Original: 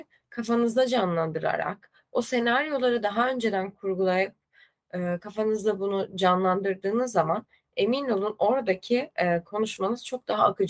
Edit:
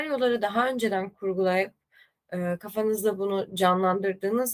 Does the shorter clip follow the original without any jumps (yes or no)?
yes